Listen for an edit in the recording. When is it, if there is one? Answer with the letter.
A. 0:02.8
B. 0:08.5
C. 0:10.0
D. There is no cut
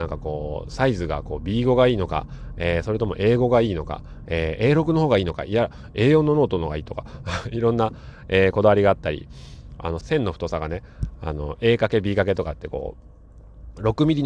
C